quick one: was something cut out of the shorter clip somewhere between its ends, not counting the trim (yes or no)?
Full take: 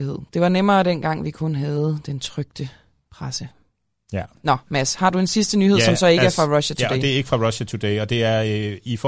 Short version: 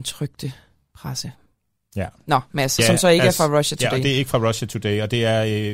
yes